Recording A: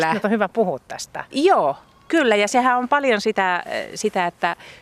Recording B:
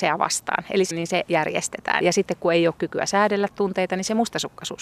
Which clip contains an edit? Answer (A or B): B